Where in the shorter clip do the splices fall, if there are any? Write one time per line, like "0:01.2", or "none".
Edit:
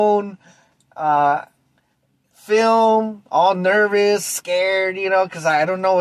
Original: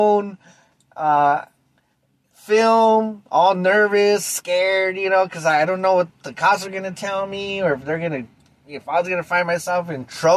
none